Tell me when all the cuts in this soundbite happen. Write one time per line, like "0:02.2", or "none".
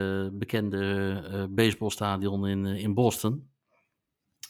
none